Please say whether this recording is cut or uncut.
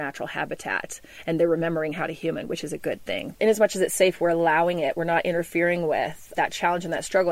cut